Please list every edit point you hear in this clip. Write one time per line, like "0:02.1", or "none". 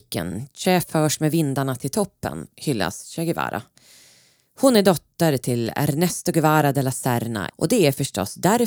0:07.5